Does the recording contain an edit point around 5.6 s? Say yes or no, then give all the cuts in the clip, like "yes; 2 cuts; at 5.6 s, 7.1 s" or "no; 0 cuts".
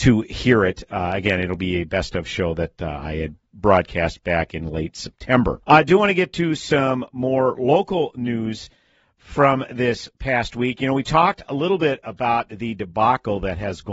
yes; 1 cut; at 5.6 s